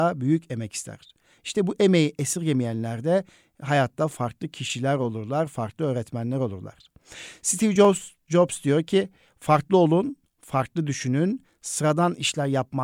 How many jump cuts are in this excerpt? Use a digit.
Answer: 0